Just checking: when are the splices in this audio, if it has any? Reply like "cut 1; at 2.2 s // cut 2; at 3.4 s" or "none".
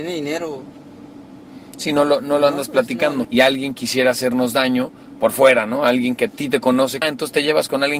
cut 1; at 3.2 s // cut 2; at 7.0 s